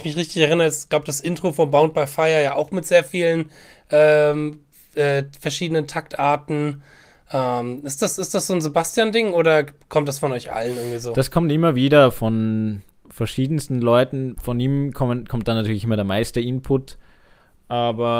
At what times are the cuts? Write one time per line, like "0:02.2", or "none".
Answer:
none